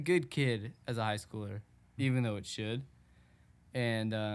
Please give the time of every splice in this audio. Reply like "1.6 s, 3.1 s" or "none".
2.0 s